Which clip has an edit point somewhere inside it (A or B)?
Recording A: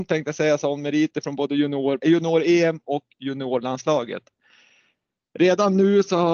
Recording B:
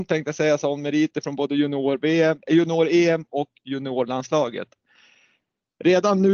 A